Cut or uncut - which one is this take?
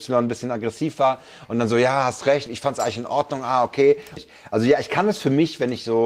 cut